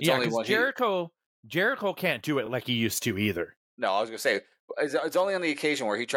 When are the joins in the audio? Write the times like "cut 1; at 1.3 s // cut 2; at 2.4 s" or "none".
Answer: none